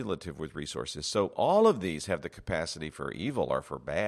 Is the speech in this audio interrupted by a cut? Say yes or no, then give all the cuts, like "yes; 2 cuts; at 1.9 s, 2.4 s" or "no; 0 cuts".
no; 0 cuts